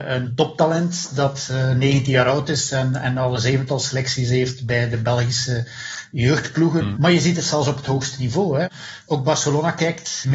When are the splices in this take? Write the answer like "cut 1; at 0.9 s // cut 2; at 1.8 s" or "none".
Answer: cut 1; at 7.0 s